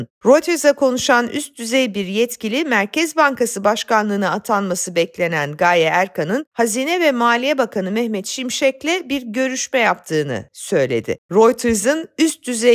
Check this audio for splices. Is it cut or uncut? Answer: cut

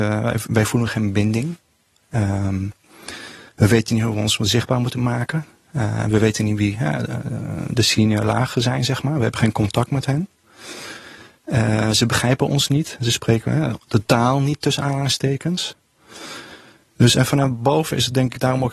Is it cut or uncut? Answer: uncut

